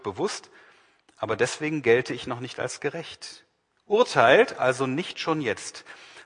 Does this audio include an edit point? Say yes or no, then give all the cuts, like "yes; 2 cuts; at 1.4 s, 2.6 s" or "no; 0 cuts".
yes; 1 cut; at 3.8 s